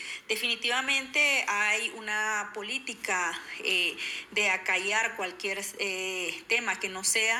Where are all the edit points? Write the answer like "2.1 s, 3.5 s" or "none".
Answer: none